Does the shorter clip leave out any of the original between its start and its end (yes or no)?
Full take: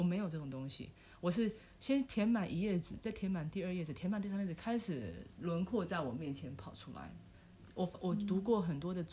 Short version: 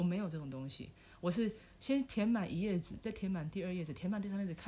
no